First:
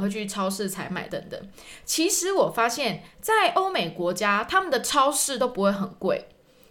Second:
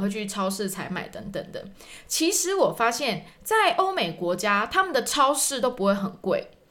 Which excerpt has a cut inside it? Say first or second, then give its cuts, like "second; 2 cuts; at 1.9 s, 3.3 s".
first; 1 cut; at 1.1 s